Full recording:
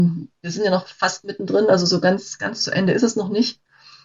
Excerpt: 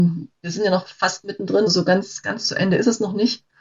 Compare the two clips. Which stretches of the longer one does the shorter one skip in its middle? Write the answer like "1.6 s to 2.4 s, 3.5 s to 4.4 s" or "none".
1.7 s to 1.8 s